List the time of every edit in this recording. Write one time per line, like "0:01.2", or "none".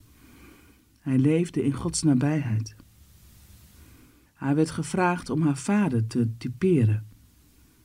0:04.3

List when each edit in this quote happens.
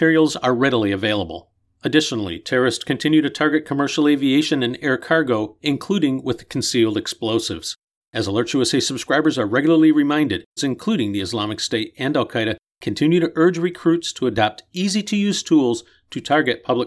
0:08.0
0:10.6

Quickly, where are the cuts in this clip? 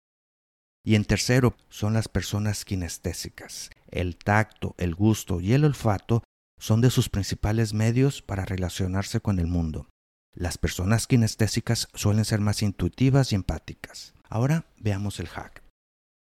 0:03.8
0:14.2

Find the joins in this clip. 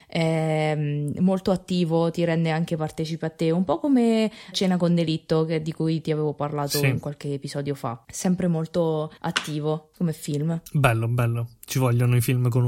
0:04.5

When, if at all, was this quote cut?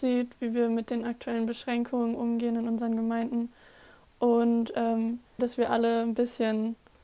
0:05.4

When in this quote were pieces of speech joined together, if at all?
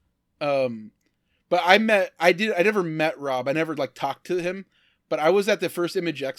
none

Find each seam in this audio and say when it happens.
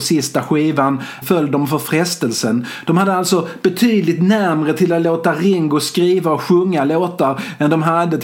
0:01.2

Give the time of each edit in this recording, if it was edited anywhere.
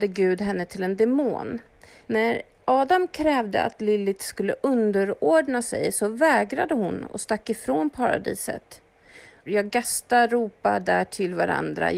0:02.0
0:09.5

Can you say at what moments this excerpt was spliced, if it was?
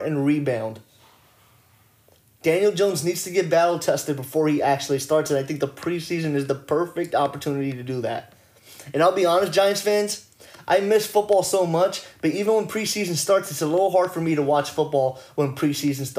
none

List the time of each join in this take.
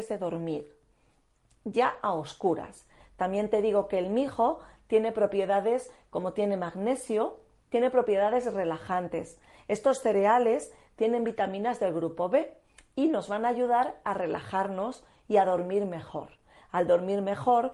0:03.0

